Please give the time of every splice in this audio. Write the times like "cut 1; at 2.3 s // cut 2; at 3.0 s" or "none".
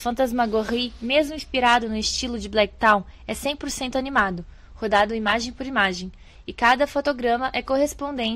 none